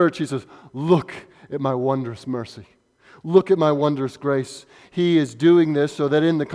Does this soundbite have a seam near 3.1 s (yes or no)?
no